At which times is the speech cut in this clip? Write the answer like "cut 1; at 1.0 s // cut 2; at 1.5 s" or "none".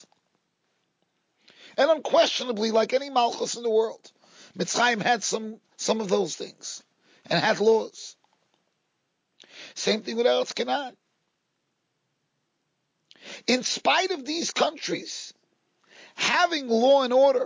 none